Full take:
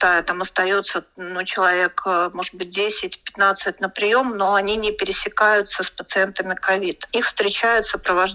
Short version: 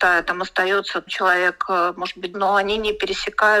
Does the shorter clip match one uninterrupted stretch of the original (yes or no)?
no